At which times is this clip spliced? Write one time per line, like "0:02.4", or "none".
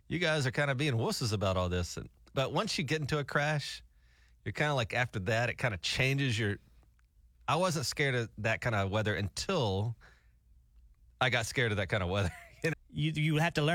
0:12.7